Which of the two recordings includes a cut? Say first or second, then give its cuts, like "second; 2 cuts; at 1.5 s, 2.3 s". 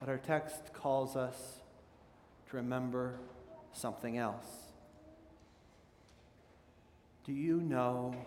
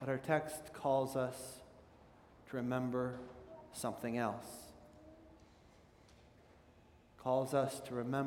first; 1 cut; at 7.0 s